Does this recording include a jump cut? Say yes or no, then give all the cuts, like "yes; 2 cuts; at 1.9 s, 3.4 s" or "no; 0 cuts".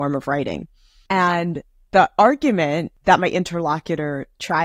yes; 1 cut; at 1.1 s